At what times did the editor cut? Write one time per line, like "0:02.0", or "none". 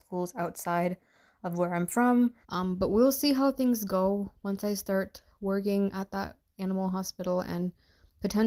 0:02.4